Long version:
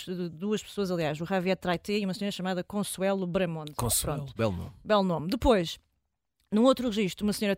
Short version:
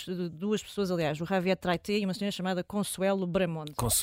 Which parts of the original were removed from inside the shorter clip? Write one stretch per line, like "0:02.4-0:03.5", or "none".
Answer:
none